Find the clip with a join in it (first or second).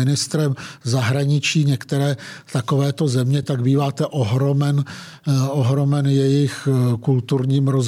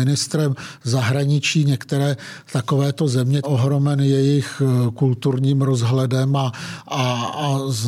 second